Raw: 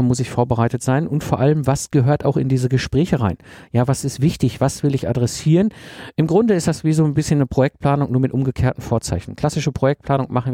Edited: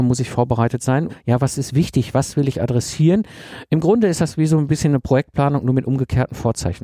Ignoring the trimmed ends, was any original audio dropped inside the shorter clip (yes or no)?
yes